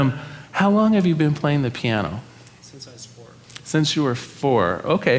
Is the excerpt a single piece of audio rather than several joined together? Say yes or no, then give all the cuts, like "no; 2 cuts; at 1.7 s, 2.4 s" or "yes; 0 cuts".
yes; 0 cuts